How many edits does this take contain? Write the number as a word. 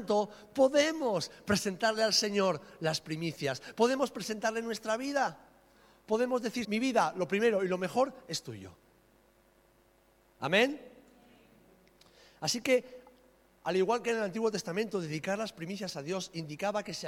one